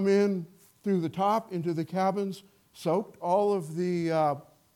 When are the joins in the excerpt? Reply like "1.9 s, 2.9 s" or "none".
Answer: none